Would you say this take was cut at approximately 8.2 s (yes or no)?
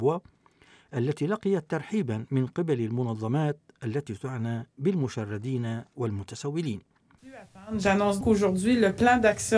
yes